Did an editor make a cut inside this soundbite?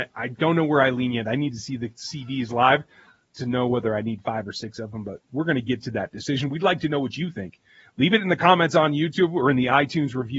no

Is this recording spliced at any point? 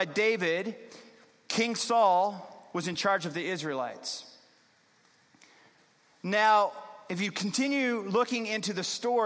no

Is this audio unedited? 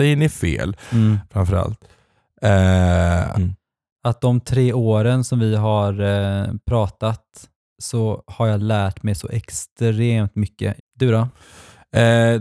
no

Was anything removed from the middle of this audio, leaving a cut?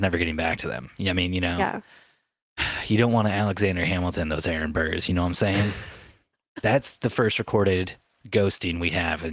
no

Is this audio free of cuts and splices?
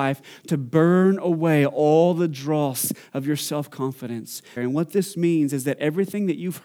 no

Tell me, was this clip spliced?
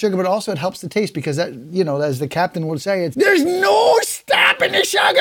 yes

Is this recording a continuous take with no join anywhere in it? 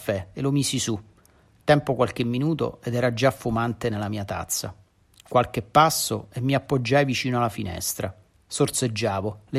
yes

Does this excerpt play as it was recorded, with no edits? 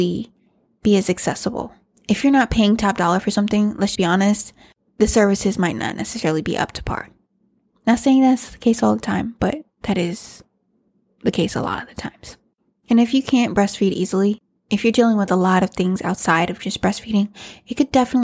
no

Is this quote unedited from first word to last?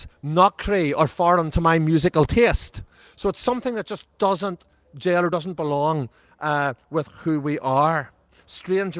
yes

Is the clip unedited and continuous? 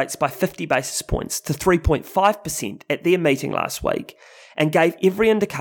yes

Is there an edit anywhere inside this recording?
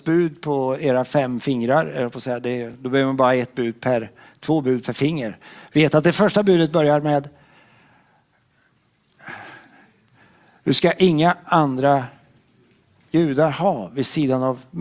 no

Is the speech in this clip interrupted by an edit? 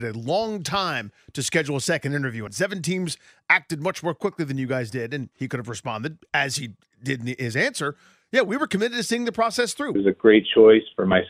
yes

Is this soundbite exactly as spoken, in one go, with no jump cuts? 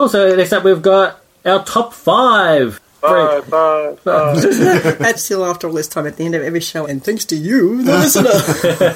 no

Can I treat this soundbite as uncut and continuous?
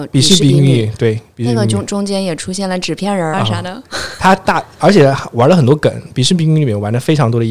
no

